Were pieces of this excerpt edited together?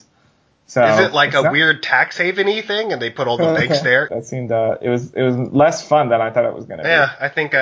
yes; 1 cut; at 4.1 s

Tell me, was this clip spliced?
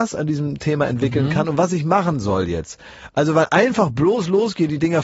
no; 0 cuts

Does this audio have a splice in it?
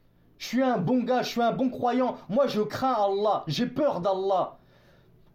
no; 0 cuts

